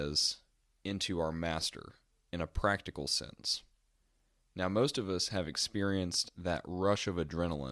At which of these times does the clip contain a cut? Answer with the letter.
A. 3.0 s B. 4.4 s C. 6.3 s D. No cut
B